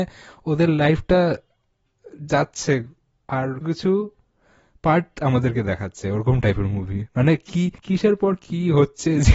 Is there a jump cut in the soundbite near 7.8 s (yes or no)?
yes